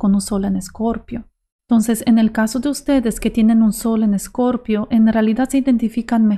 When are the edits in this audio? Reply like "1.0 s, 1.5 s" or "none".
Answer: 1.6 s